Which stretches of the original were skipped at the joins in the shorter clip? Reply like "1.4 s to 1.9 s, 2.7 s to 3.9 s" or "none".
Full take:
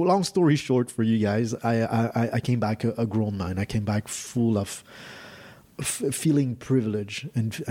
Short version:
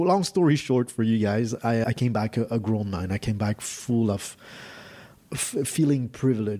1.8 s to 2.3 s